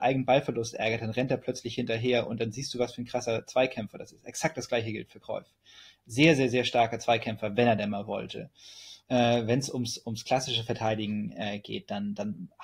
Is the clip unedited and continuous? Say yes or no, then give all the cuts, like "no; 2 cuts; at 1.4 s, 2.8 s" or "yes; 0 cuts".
no; 1 cut; at 9.0 s